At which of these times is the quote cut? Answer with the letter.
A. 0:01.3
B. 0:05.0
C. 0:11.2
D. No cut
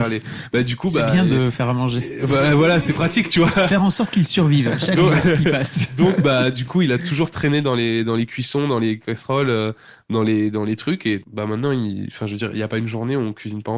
C